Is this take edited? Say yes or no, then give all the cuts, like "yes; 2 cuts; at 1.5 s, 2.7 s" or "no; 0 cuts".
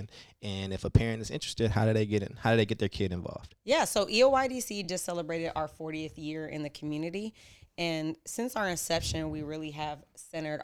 no; 0 cuts